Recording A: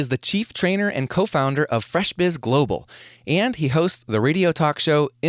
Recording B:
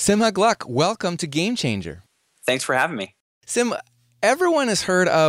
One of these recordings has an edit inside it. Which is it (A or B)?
A